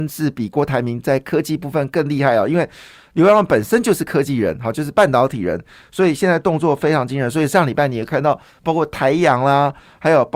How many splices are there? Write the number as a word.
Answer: zero